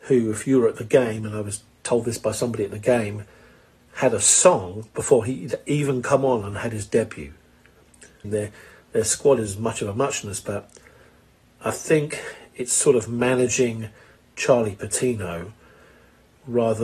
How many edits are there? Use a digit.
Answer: 1